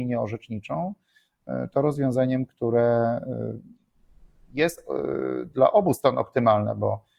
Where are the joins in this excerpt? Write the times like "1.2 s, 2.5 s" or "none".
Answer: none